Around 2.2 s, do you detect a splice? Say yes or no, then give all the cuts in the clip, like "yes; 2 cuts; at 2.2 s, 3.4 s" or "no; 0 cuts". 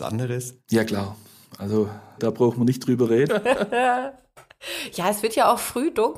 yes; 2 cuts; at 2.2 s, 3.3 s